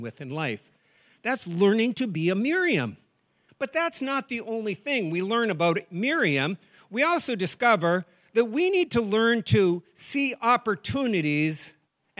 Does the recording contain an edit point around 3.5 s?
yes; 1 cut; at 3.5 s

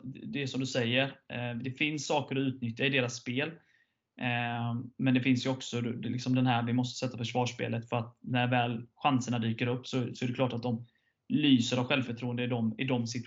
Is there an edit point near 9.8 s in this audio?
no; 0 cuts

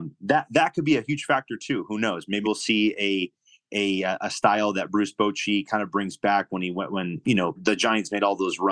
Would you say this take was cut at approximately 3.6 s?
no; 2 cuts; at 2.4 s, 7.6 s

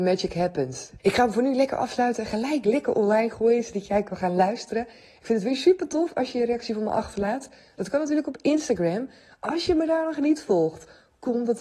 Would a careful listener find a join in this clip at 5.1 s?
no; 1 cut; at 1.0 s

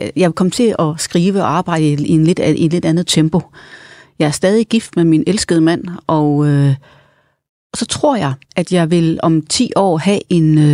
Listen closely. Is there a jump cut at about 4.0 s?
yes; 1 cut; at 4.0 s

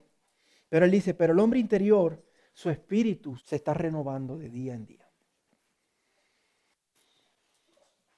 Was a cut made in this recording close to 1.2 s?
no; 1 cut; at 3.4 s

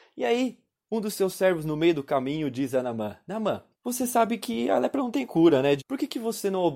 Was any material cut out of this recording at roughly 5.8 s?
yes; 2 cuts; at 3.7 s, 5.8 s

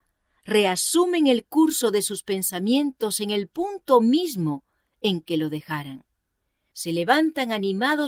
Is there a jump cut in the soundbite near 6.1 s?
no; 0 cuts

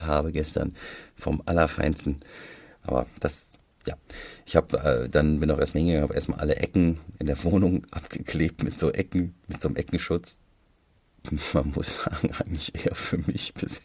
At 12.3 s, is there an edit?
no; 1 cut; at 2.8 s

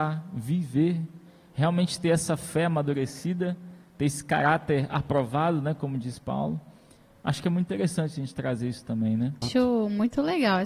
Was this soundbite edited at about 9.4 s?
yes; 1 cut; at 9.4 s

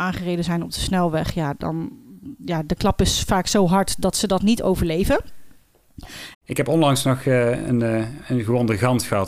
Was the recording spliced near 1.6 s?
no; 1 cut; at 6.3 s

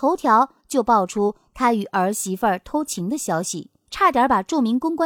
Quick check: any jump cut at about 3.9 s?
yes; 1 cut; at 3.9 s

